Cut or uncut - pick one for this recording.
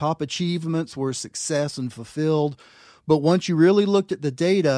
uncut